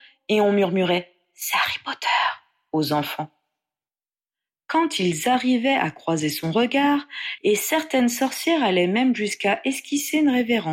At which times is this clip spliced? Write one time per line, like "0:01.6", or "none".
0:07.4